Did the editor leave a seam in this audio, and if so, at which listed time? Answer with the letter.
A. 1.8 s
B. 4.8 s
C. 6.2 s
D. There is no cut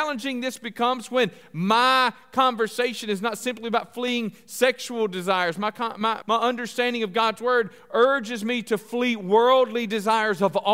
C